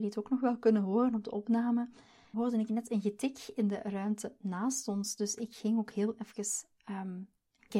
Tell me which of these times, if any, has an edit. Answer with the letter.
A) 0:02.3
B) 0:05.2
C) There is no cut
A